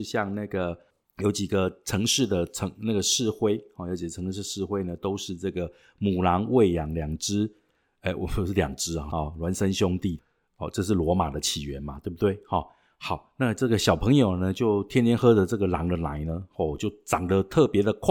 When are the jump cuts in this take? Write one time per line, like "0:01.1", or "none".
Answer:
0:09.1